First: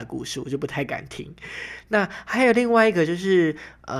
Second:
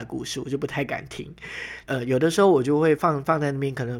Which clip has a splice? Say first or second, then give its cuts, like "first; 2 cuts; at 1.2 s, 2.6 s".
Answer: second; 2 cuts; at 1.8 s, 2.9 s